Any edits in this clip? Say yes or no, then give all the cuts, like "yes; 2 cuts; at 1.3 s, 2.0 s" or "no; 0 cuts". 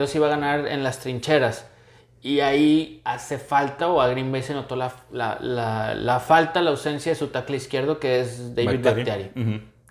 no; 0 cuts